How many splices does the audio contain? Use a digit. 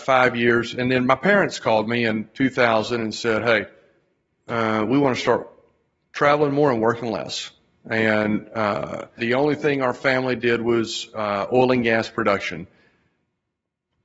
1